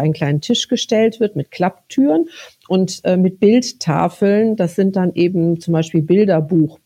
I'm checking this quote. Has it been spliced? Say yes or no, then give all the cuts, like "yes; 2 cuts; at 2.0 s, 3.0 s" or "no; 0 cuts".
no; 0 cuts